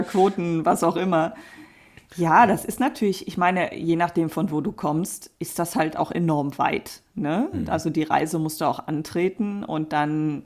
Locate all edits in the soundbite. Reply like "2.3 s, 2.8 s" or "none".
none